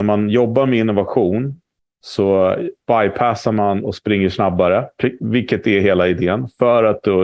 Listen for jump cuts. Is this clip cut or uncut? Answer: cut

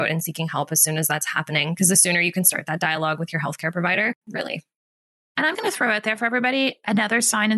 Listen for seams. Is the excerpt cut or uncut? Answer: cut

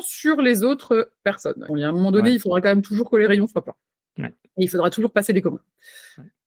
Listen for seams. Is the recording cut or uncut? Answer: cut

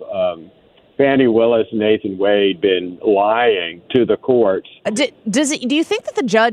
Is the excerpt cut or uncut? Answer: cut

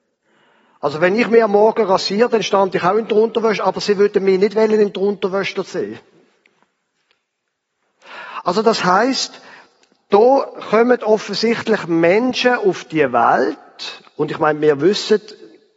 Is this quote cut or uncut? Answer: uncut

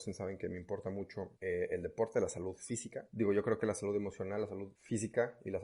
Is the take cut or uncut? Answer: uncut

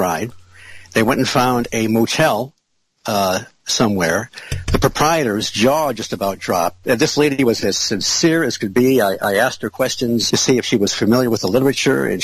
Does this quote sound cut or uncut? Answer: cut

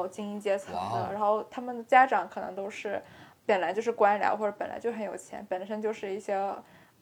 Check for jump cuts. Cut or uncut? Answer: uncut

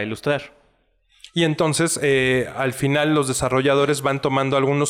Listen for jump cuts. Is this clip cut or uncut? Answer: uncut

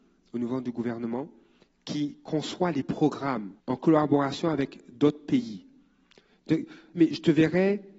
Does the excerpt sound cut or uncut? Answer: cut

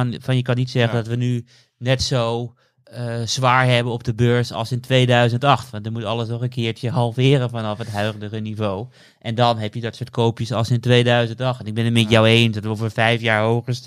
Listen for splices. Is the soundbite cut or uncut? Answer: uncut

